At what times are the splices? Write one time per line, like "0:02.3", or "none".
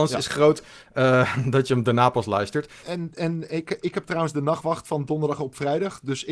0:02.8